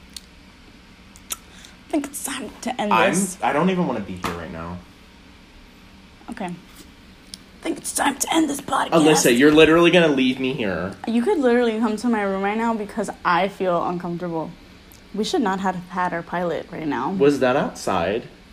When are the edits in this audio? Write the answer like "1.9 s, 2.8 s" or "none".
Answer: 15.0 s